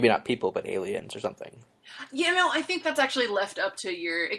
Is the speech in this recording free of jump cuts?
yes; 0 cuts

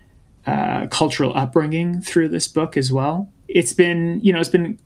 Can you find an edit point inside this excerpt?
no; 0 cuts

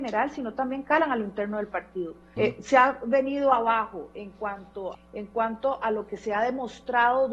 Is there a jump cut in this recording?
yes; 2 cuts; at 2.4 s, 4.9 s

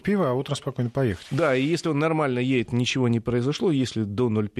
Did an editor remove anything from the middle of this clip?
no; 0 cuts

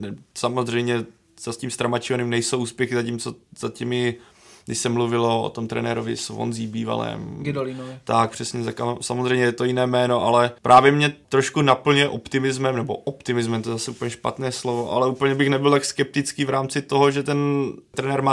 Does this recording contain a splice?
yes; 1 cut; at 10.6 s

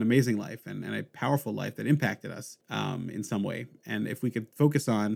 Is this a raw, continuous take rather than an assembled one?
no; 1 cut; at 2.6 s

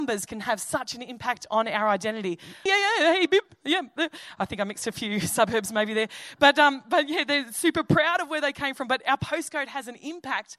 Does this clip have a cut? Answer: yes; 1 cut; at 2.7 s

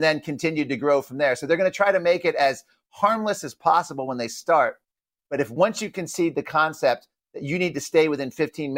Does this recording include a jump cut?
no; 0 cuts

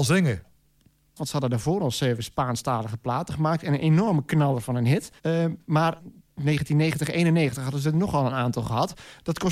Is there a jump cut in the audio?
yes; 2 cuts; at 1.2 s, 5.2 s

